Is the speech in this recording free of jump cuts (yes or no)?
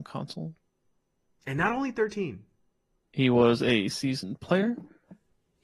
no